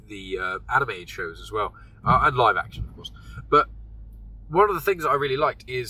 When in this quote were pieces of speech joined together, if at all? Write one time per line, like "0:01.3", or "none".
none